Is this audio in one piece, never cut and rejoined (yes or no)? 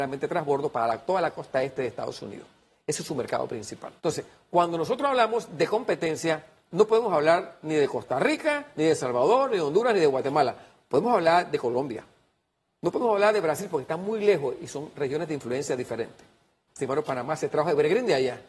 no